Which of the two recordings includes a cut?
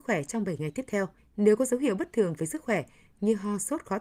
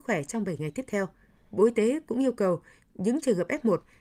first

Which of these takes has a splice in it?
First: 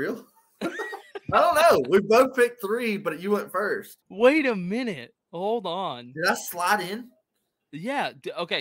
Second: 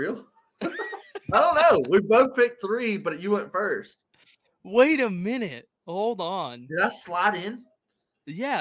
first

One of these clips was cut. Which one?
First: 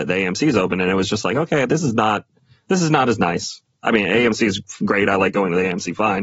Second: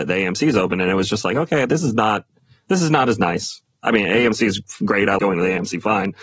second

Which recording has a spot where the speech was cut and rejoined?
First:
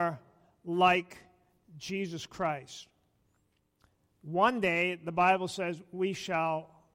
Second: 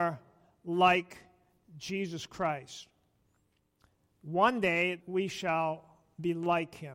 second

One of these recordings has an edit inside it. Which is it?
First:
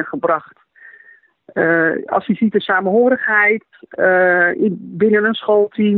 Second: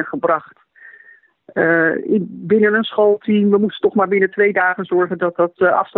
second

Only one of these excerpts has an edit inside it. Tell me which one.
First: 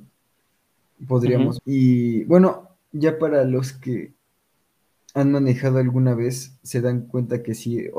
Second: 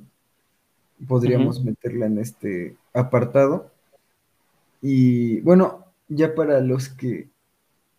first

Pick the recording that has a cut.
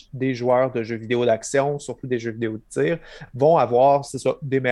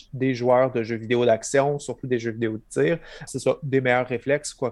second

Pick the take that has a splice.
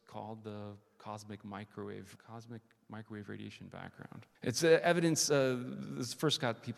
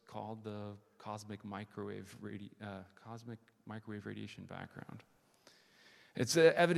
first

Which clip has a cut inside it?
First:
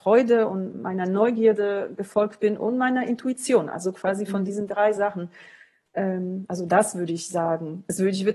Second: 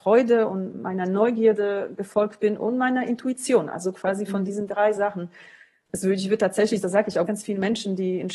second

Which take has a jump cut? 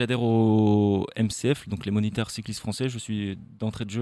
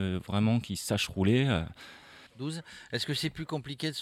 second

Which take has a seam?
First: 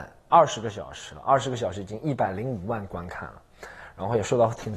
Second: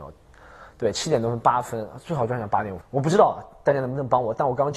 second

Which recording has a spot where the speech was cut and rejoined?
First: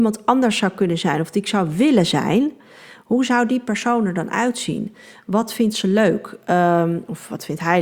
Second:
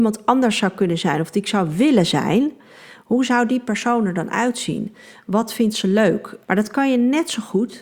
second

